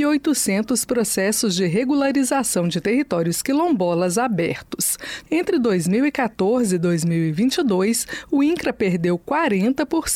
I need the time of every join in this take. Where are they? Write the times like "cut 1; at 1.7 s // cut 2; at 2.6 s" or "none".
cut 1; at 5.3 s